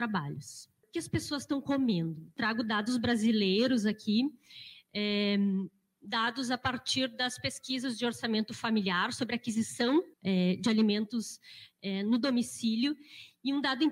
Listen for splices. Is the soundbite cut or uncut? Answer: cut